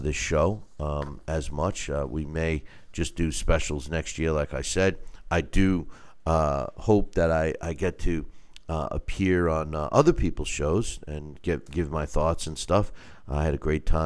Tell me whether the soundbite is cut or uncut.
uncut